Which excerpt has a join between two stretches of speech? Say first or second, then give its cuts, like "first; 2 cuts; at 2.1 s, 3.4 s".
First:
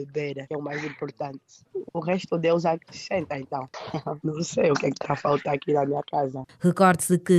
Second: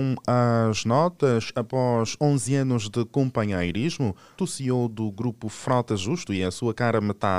second; 1 cut; at 4.4 s